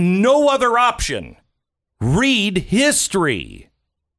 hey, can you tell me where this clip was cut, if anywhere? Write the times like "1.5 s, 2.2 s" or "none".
1.9 s